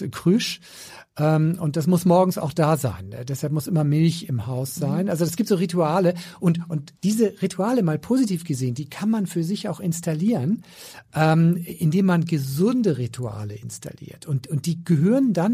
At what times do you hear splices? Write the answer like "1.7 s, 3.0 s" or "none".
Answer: 7.0 s